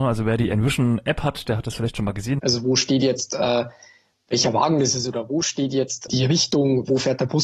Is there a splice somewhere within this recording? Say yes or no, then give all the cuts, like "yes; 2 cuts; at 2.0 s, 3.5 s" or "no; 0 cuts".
yes; 1 cut; at 2.4 s